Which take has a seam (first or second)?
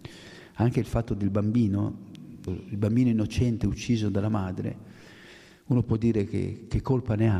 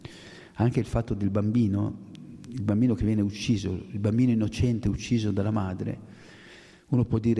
first